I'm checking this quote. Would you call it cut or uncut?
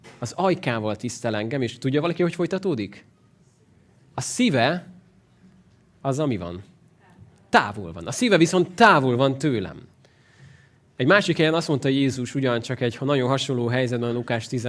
uncut